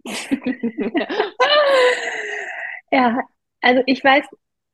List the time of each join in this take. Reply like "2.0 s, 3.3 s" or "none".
none